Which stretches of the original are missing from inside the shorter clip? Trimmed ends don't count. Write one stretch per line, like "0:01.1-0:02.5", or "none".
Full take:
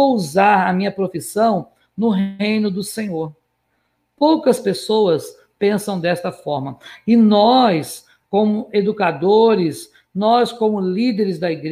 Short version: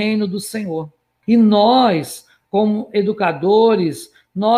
0:03.7-0:07.0